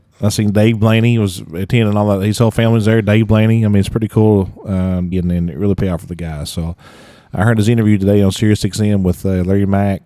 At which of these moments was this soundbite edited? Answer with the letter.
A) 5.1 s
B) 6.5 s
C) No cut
A